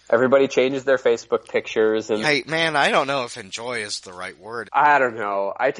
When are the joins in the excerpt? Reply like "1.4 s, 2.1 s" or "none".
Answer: 2.2 s, 4.7 s